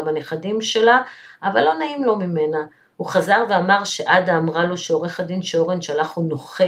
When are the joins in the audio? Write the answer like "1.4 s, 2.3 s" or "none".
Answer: none